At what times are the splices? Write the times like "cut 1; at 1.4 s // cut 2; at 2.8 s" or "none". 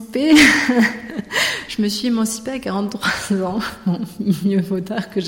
cut 1; at 1.7 s

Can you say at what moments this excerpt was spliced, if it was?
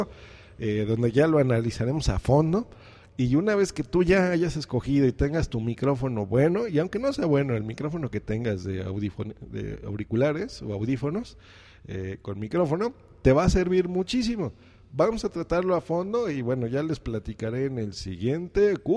none

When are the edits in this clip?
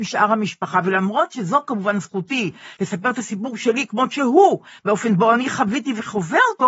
none

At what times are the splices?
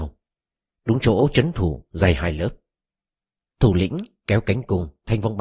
cut 1; at 3.5 s

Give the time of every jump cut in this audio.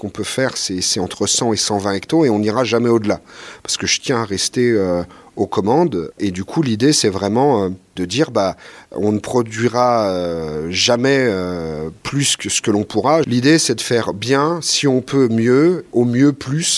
cut 1; at 6.1 s // cut 2; at 13.2 s

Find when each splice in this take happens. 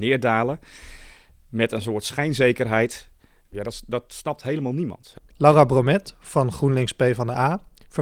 cut 1; at 5.2 s

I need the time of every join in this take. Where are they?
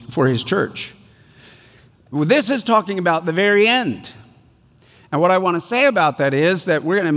none

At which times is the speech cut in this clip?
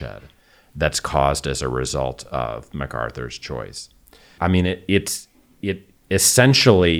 cut 1; at 4.4 s

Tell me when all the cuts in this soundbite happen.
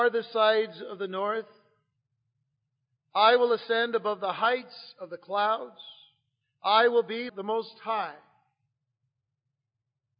cut 1; at 7.3 s

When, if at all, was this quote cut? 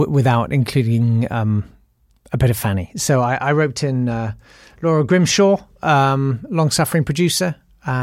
none

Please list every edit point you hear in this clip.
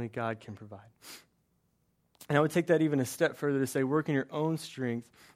none

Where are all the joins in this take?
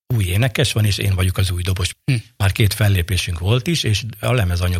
cut 1; at 1.9 s

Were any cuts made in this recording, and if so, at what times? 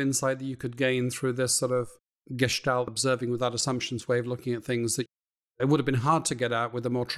cut 1; at 2.9 s

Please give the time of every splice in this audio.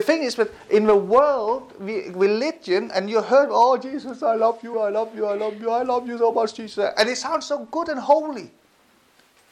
cut 1; at 4.7 s

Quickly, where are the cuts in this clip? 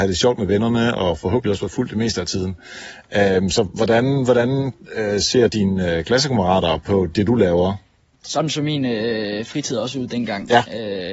none

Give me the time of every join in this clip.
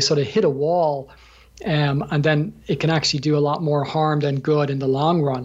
none

